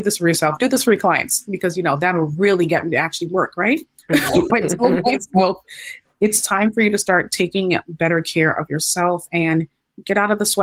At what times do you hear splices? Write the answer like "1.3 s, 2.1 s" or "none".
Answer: 4.5 s